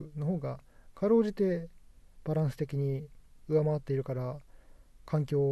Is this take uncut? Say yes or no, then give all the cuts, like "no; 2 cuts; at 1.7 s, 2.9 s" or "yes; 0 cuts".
yes; 0 cuts